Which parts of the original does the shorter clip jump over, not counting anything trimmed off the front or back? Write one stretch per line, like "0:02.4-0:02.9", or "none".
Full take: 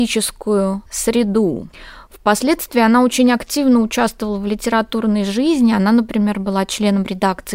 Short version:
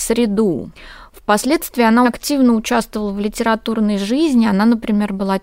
0:03.0-0:03.3